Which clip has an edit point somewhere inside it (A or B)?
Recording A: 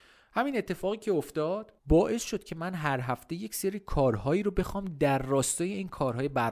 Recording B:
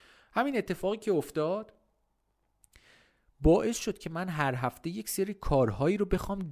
A